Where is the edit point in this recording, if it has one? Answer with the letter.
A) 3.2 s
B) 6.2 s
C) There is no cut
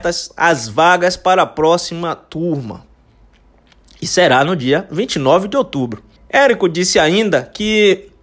B